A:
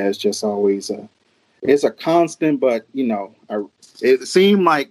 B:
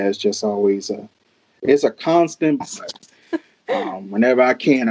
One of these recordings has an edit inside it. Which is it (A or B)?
B